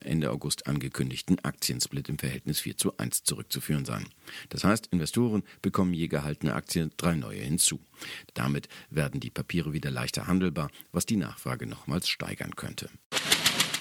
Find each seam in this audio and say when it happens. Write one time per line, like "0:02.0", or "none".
0:08.3